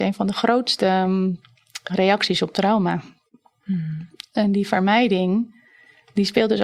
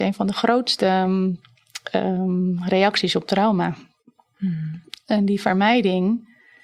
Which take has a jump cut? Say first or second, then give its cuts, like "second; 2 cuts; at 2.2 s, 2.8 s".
first; 1 cut; at 1.9 s